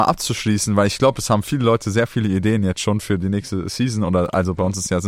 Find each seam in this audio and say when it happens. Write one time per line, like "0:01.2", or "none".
none